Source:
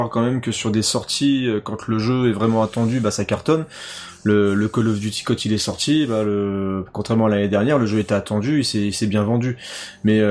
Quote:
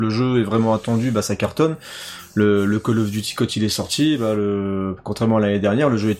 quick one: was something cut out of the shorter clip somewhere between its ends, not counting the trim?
no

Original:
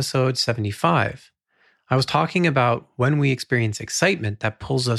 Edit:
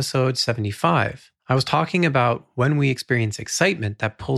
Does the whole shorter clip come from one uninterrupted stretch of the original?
no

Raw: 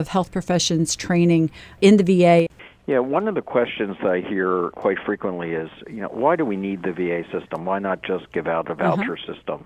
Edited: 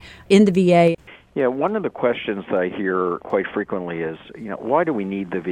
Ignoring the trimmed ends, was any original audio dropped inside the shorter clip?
no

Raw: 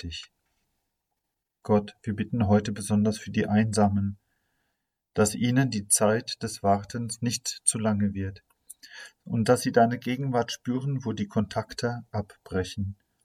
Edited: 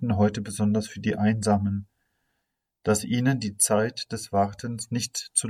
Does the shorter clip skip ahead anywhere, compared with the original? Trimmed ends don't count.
no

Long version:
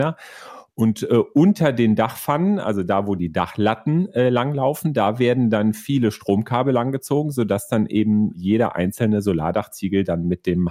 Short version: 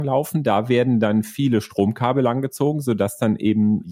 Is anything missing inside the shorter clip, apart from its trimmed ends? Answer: no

